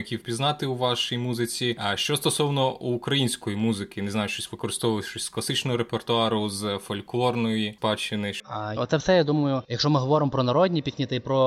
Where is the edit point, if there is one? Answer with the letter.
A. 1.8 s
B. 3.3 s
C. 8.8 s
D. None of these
C